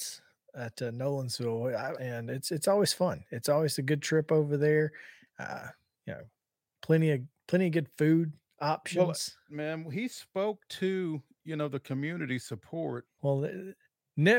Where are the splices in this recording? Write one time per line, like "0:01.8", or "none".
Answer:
0:01.9
0:09.5
0:13.2